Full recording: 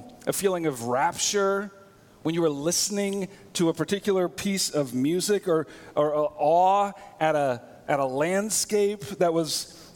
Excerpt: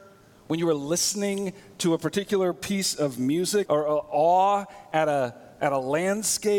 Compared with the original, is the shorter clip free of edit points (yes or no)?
no